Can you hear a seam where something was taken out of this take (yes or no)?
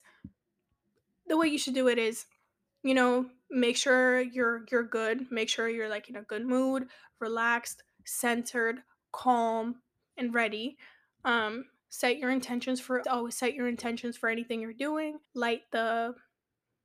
yes